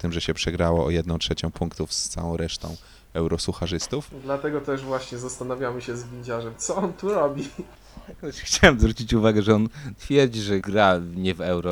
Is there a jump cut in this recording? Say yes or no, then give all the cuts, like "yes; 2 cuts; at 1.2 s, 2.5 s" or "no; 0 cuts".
yes; 1 cut; at 10.6 s